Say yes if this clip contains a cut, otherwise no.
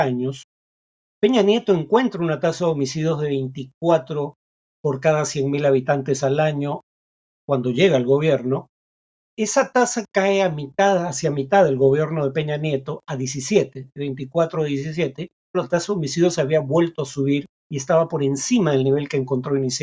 yes